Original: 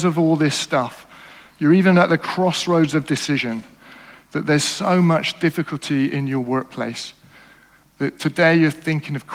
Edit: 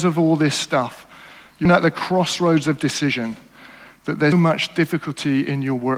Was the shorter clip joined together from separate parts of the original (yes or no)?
yes